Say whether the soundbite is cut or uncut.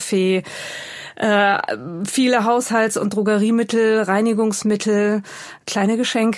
uncut